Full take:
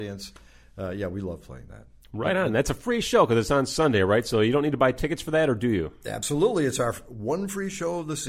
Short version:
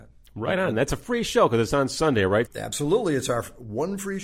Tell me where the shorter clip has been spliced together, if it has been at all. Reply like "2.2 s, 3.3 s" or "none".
2.5 s